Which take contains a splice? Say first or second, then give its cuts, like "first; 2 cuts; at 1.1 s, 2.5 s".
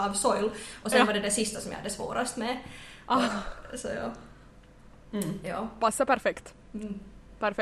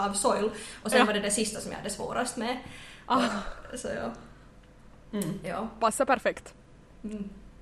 first; 1 cut; at 6.6 s